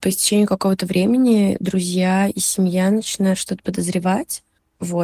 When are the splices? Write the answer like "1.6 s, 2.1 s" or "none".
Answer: none